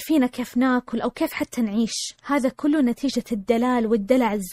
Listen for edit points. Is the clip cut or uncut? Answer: uncut